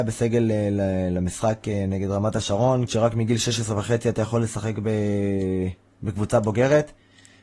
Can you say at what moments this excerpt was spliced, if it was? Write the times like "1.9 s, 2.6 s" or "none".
2.9 s